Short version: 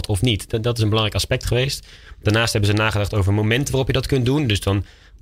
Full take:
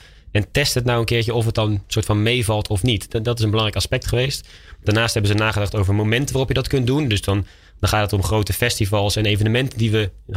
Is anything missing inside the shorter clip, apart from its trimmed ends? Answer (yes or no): no